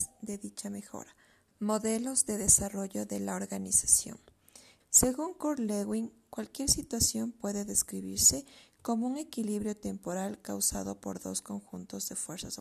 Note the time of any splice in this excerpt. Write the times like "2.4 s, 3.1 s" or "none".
1.5 s, 4.8 s